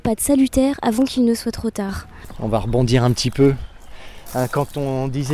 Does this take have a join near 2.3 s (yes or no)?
no